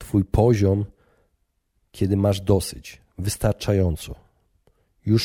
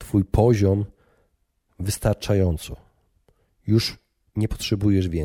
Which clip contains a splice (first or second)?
second